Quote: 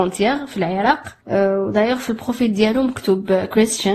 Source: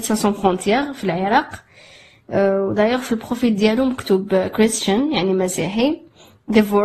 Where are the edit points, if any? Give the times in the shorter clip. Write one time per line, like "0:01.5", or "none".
0:01.2